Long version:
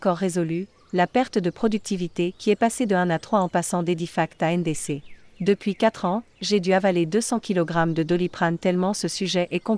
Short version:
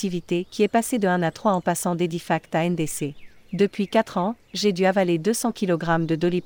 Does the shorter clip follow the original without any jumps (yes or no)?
yes